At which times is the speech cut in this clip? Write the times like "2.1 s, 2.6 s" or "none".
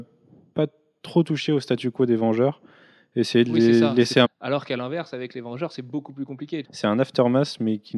4.2 s, 6.6 s